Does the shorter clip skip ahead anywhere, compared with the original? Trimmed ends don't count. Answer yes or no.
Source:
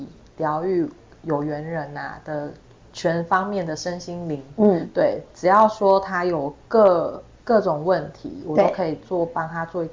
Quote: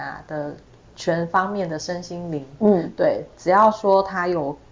no